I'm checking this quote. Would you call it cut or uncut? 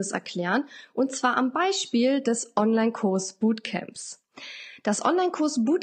uncut